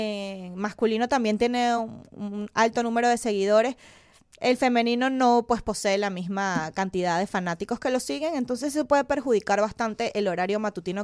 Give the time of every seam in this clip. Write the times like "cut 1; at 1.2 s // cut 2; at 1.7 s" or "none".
none